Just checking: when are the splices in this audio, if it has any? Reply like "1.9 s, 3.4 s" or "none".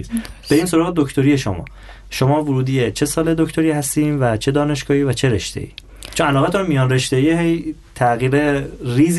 none